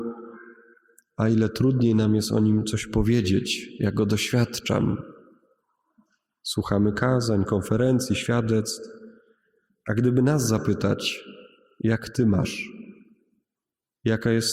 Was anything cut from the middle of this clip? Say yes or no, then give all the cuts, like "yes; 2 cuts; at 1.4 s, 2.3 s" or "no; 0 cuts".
no; 0 cuts